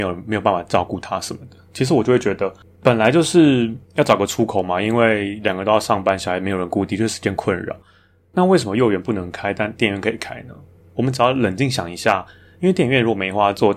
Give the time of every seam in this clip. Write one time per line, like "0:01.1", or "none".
none